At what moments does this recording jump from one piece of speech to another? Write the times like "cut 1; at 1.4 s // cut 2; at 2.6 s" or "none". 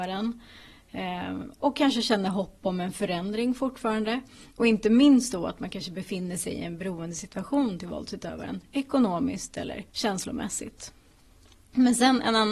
cut 1; at 9.9 s